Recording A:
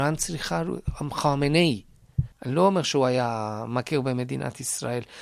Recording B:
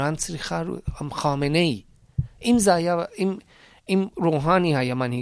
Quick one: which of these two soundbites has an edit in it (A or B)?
A